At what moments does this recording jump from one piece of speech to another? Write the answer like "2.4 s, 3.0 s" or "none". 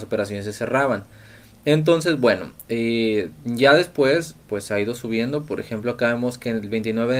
none